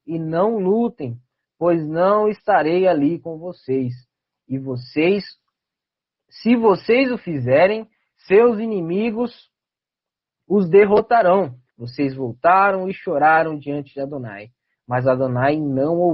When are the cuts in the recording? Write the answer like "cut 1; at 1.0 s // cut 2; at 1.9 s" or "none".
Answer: cut 1; at 11.7 s